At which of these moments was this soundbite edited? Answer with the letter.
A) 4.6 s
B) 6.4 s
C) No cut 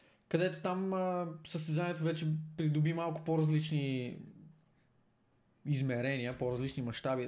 C